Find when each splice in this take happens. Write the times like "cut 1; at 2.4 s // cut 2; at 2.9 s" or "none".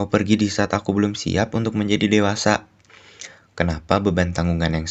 none